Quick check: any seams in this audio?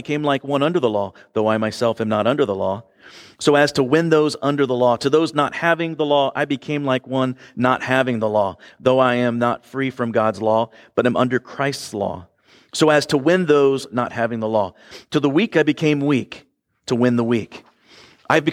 no; 0 cuts

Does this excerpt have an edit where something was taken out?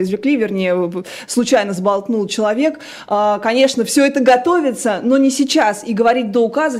no; 0 cuts

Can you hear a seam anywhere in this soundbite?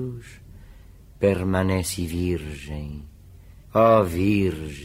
yes; 1 cut; at 3.6 s

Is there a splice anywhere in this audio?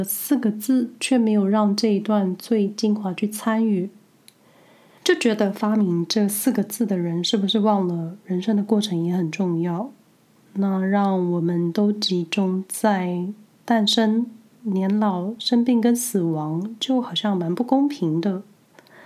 no; 0 cuts

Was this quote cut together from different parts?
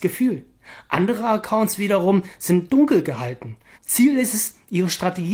yes; 1 cut; at 3.8 s

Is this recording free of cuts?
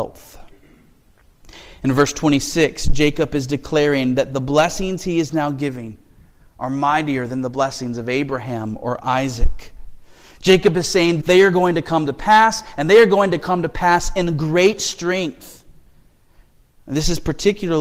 no; 1 cut; at 11.2 s

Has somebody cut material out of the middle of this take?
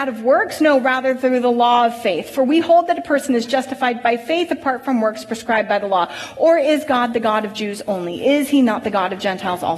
no; 0 cuts

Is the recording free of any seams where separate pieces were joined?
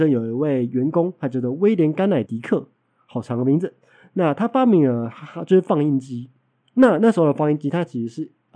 no; 1 cut; at 2.2 s

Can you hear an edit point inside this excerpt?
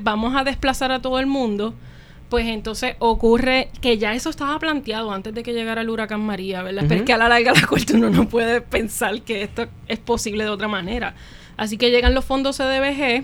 yes; 2 cuts; at 6.8 s, 11.5 s

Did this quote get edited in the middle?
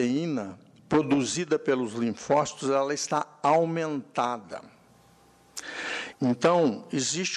yes; 1 cut; at 6.1 s

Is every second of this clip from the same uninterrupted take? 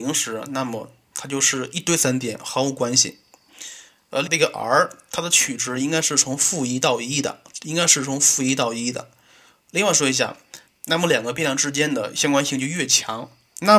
no; 2 cuts; at 4.2 s, 10.7 s

